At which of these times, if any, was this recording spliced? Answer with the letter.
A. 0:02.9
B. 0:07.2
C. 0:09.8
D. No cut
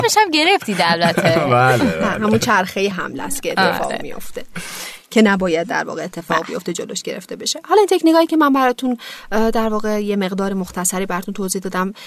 A